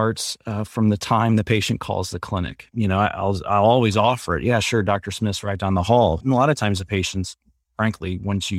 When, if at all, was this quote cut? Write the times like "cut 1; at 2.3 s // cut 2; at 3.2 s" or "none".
cut 1; at 2.7 s // cut 2; at 6.2 s